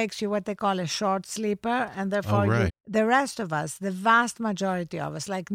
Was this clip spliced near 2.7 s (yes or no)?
yes